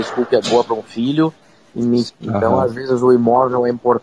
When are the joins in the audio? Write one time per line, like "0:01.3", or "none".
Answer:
0:02.1